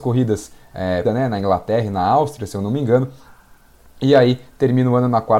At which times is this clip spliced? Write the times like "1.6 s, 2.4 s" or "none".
1.0 s